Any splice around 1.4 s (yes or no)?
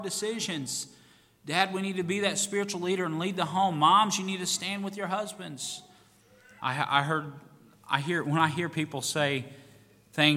no